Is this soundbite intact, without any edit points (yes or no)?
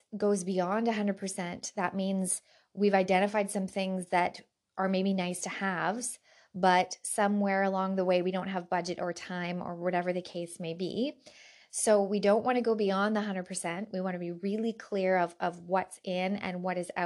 yes